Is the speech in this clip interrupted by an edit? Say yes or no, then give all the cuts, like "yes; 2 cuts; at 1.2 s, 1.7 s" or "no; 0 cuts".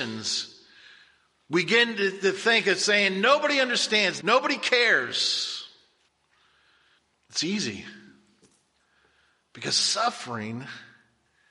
yes; 1 cut; at 4.2 s